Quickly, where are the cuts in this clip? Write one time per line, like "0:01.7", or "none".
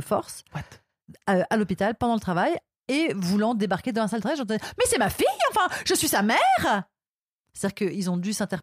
none